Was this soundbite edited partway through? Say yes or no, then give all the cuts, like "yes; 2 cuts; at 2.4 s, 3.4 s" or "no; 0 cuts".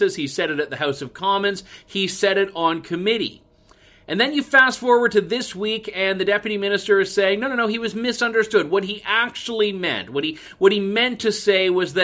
no; 0 cuts